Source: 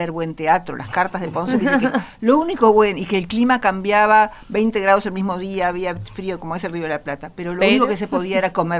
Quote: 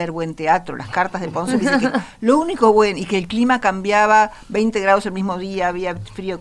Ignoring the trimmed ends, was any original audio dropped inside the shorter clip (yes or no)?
no